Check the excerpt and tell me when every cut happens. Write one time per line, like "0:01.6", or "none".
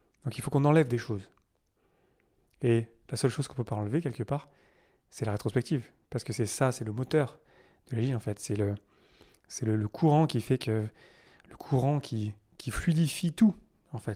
none